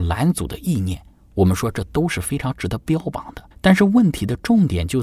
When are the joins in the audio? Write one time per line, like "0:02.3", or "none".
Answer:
0:03.5